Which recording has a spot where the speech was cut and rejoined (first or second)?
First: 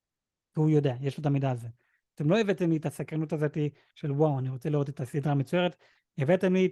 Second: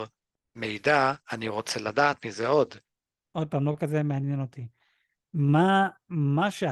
second